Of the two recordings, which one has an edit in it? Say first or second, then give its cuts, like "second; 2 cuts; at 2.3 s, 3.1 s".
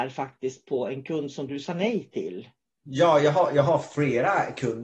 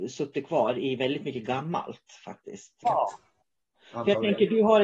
second; 1 cut; at 2.8 s